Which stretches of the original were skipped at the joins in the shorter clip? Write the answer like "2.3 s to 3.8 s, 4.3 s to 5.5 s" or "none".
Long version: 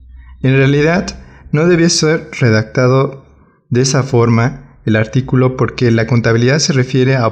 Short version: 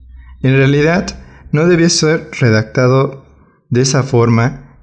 none